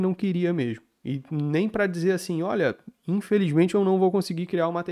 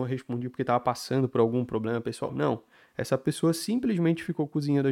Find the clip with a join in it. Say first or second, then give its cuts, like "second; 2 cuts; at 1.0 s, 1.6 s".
second; 1 cut; at 2.3 s